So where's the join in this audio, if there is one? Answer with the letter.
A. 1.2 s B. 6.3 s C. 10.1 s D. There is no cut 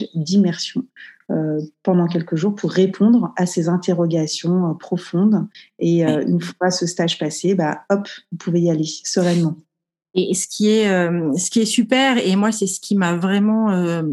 D